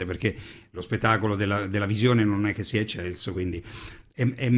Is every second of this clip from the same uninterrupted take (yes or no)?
yes